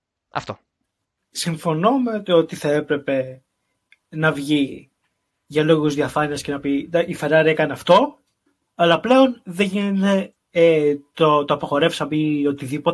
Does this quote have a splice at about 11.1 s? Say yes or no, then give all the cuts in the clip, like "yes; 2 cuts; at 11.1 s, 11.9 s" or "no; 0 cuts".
no; 1 cut; at 1.3 s